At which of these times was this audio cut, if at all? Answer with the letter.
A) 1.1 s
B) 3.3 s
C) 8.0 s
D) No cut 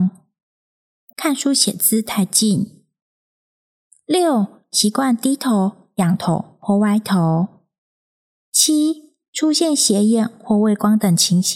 A